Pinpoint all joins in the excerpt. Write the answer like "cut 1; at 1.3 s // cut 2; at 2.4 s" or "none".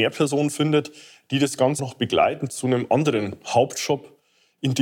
cut 1; at 1.8 s